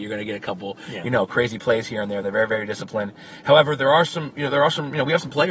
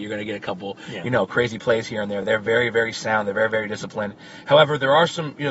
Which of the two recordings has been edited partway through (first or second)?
first